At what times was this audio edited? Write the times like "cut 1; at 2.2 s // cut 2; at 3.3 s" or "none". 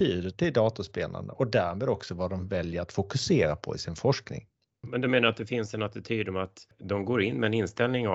none